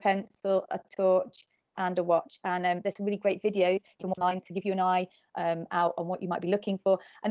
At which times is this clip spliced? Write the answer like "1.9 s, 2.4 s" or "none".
none